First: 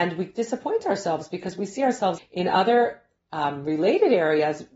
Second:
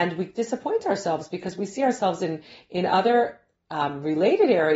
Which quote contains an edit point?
first; 1 cut; at 2.2 s

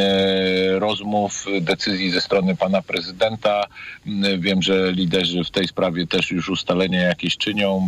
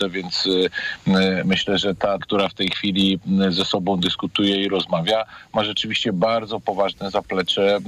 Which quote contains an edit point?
second; 1 cut; at 2.2 s

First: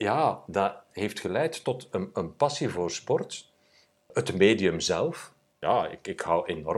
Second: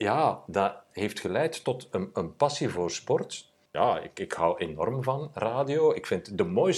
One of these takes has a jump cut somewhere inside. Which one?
second; 1 cut; at 3.7 s

